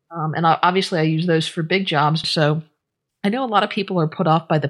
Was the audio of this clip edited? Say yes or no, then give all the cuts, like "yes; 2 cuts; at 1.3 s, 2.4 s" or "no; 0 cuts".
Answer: yes; 1 cut; at 2.2 s